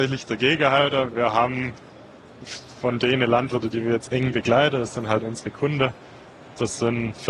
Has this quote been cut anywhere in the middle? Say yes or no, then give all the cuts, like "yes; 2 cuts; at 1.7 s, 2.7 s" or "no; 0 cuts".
no; 0 cuts